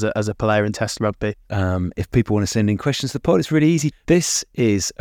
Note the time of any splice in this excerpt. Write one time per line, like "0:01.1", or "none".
0:01.4
0:03.9